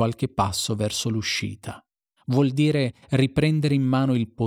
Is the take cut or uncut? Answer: cut